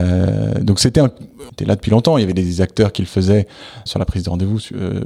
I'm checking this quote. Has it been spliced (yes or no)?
yes